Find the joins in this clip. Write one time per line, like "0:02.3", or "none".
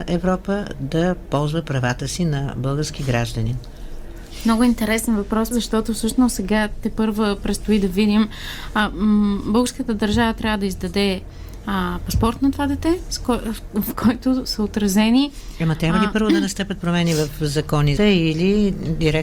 0:05.5
0:18.0